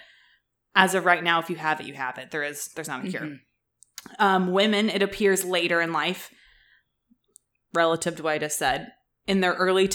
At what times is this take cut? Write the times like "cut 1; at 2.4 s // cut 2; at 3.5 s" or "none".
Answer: none

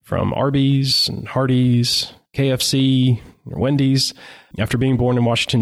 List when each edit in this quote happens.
cut 1; at 4.5 s

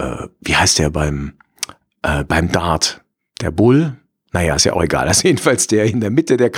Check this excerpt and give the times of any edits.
none

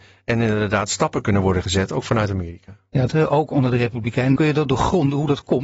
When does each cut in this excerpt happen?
cut 1; at 3.1 s // cut 2; at 4.4 s

